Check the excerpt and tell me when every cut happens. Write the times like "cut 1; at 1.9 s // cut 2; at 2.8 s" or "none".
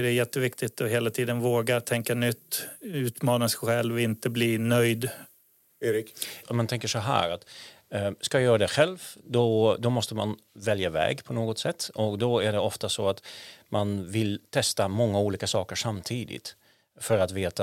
none